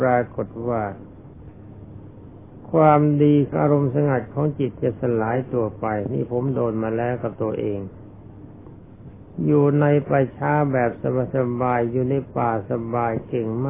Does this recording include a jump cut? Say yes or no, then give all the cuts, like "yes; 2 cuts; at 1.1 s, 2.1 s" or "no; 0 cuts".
yes; 1 cut; at 3.5 s